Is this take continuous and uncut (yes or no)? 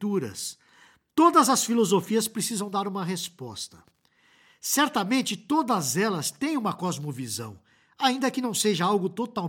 yes